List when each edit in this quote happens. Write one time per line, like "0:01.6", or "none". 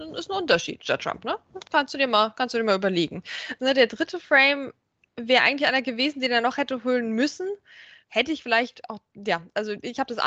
0:03.6
0:08.0

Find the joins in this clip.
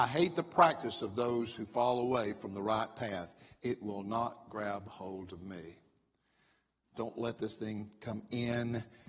0:06.9

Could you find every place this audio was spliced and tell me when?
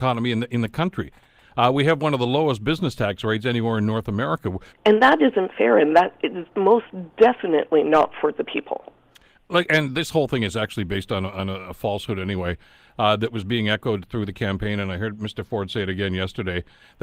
0:04.7

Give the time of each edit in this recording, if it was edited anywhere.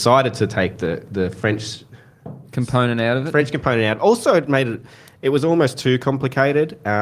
none

